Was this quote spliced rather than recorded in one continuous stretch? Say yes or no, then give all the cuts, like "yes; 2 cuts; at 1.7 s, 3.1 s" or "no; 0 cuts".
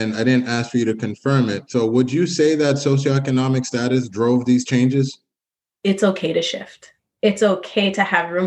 yes; 2 cuts; at 5.7 s, 7.2 s